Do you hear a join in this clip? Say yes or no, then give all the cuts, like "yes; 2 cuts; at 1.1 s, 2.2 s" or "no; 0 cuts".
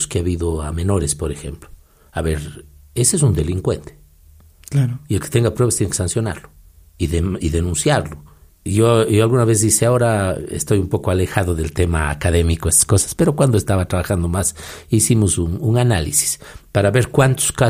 yes; 1 cut; at 8.5 s